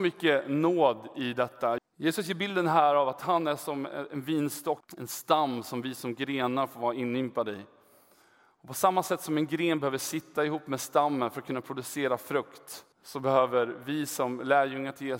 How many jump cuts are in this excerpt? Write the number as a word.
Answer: three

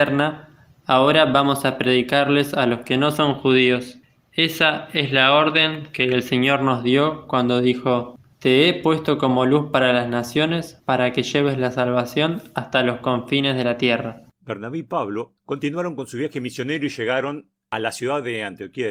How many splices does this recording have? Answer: zero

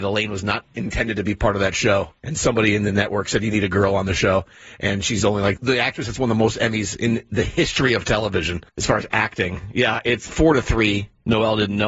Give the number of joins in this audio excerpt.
two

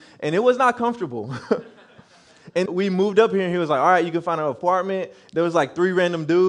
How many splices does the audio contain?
one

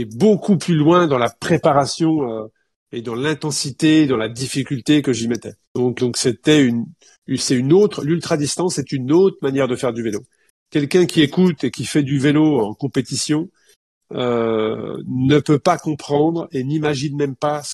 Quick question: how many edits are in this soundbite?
one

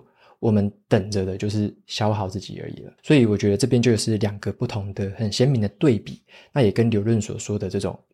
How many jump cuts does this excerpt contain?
one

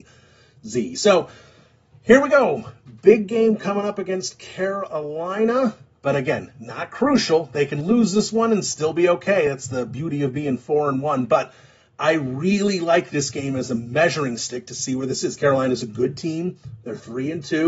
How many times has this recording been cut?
zero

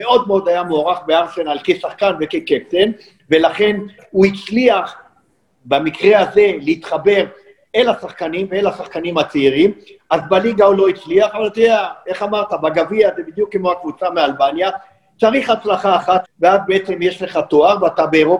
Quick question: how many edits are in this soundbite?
one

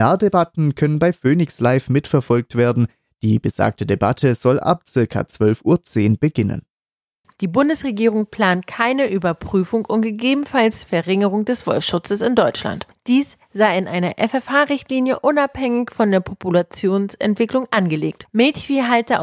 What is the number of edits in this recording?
two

